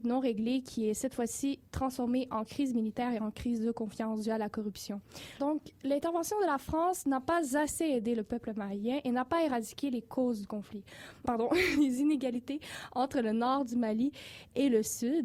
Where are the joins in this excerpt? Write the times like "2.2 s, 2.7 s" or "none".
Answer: 5.4 s, 11.2 s

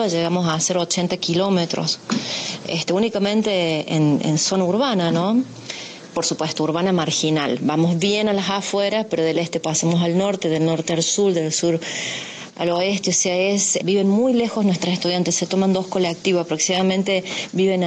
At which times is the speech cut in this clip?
13.8 s

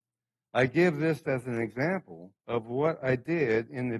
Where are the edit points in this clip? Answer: 1.2 s, 2.4 s

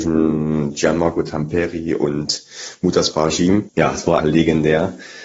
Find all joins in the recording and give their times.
4.2 s

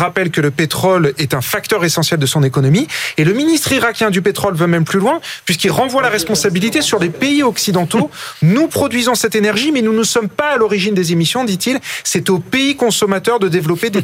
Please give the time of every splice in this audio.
none

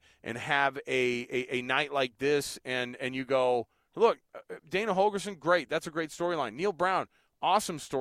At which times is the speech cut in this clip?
none

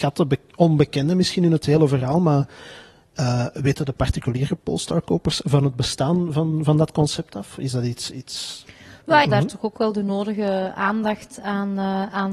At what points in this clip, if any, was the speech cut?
9.2 s

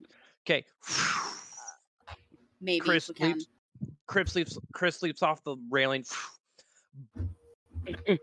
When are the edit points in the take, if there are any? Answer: 7.1 s

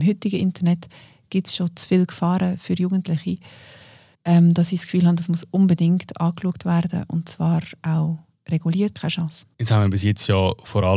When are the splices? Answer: 8.9 s

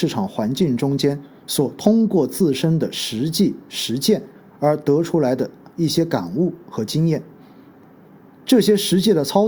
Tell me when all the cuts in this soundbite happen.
none

